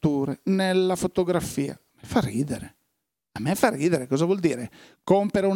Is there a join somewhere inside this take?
no; 0 cuts

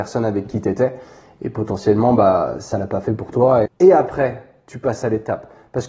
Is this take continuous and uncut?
no; 1 cut; at 3.6 s

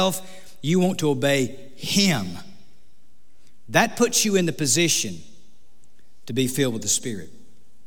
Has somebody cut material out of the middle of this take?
no; 0 cuts

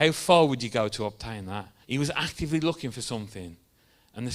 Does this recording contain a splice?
yes; 1 cut; at 1.8 s

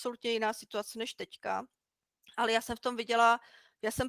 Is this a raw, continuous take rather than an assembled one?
yes; 0 cuts

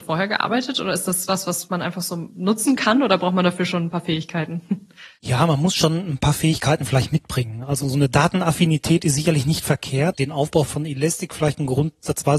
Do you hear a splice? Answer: yes; 1 cut; at 10.1 s

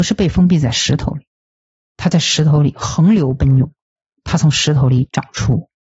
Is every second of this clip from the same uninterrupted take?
yes; 0 cuts

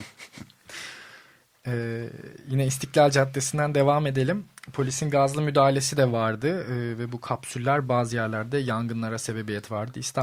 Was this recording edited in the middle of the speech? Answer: no; 0 cuts

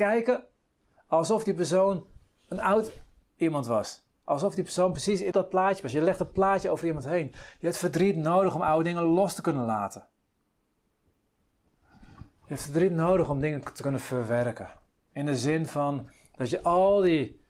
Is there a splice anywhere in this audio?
yes; 1 cut; at 5.3 s

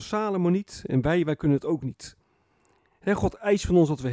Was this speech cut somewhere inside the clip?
no; 0 cuts

